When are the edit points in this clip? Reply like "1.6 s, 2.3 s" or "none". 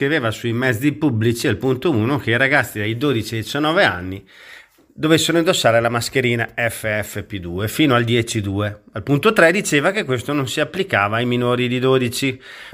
none